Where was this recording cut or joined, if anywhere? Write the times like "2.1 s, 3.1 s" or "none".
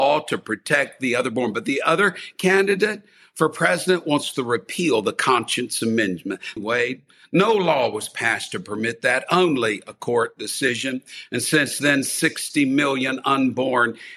6.6 s